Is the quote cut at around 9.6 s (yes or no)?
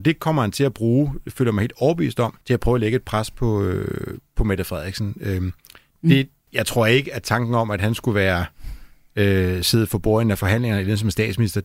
no